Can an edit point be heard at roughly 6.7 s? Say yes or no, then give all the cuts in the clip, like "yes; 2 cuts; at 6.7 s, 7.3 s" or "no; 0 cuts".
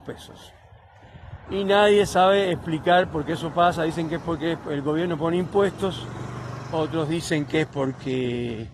no; 1 cut; at 1.5 s